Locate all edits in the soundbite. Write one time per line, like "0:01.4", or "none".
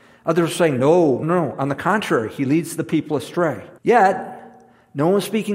0:01.2
0:03.8